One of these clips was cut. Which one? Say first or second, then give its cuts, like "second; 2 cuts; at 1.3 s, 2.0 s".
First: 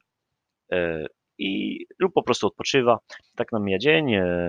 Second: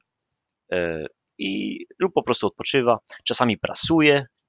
first; 1 cut; at 3.2 s